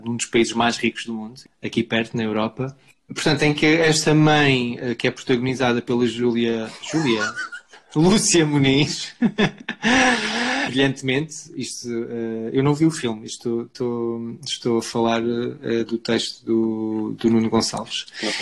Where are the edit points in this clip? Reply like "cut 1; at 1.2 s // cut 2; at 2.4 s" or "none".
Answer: none